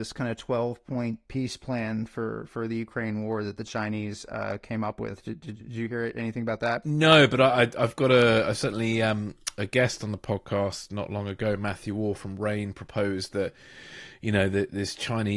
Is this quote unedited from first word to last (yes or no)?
yes